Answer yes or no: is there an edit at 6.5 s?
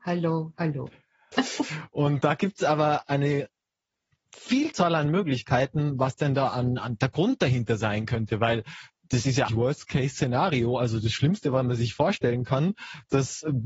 no